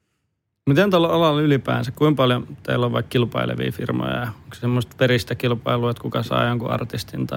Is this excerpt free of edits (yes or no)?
yes